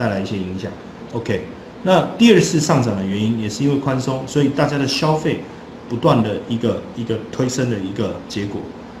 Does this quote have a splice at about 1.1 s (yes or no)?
yes